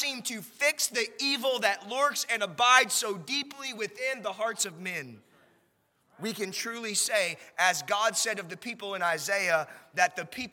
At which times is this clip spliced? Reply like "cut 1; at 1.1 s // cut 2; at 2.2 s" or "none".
none